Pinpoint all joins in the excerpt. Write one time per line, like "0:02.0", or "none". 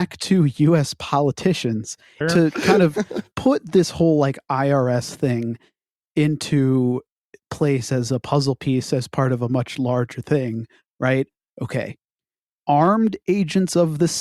0:02.2